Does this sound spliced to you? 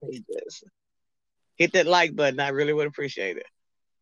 no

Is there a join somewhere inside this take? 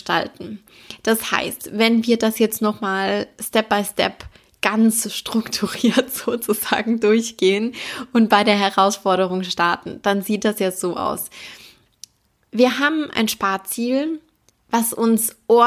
no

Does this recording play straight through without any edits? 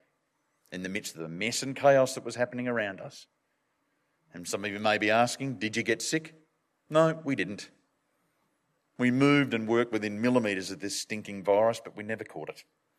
yes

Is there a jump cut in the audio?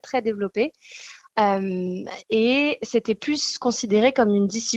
no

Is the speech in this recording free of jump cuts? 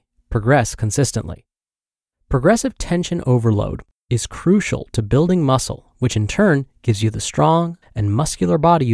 no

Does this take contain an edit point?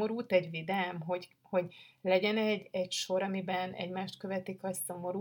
no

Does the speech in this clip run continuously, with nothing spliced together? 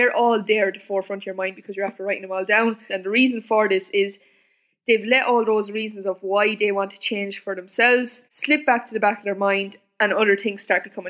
no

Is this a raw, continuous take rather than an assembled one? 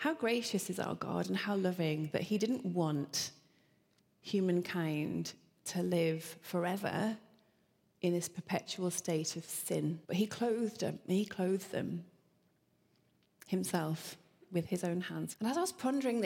no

